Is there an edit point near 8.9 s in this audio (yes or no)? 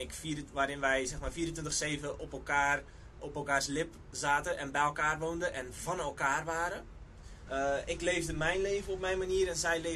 no